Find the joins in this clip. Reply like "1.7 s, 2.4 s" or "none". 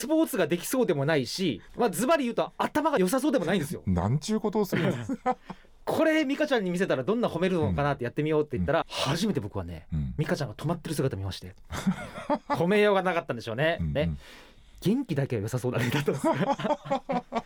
8.8 s, 14.0 s